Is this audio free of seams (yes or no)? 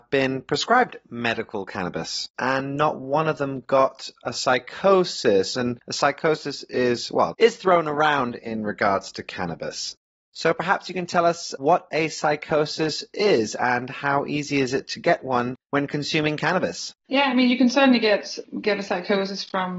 no